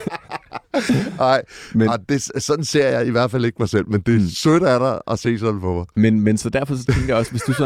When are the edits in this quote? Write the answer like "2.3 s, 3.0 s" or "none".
none